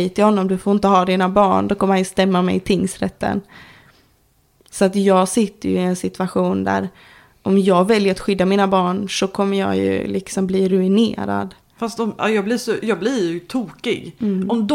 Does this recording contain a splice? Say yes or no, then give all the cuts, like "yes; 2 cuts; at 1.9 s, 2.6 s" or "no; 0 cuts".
no; 0 cuts